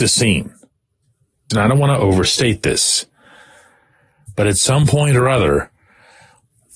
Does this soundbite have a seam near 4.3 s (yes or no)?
no